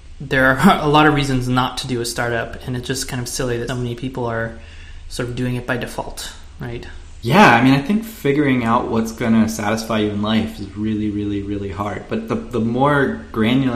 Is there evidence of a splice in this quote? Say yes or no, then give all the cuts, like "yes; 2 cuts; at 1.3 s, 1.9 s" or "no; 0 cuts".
yes; 1 cut; at 3.7 s